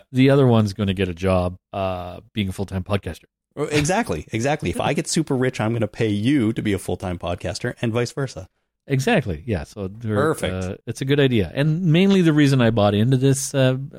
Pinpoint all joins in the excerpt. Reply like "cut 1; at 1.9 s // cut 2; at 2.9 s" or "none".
cut 1; at 1.6 s